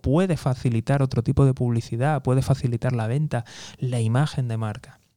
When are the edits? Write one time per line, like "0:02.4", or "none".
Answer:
none